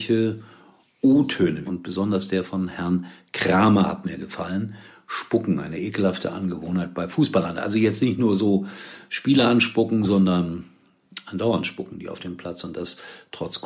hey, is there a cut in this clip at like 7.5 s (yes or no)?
no